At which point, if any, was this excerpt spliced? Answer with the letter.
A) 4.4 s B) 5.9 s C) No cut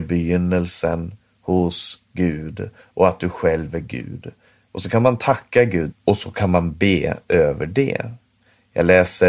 B